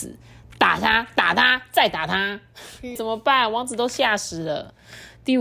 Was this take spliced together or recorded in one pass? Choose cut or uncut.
cut